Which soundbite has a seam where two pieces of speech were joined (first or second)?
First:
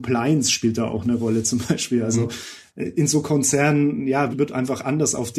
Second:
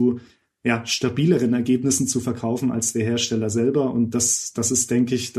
first